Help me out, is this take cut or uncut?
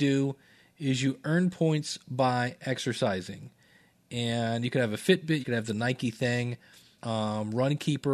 cut